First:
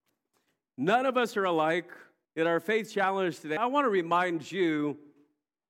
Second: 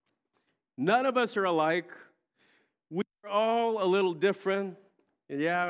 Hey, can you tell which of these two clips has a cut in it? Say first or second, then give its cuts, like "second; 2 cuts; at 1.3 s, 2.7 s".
first; 2 cuts; at 2.2 s, 3.6 s